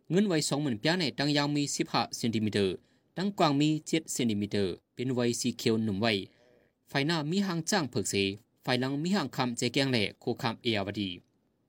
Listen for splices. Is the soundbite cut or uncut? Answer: cut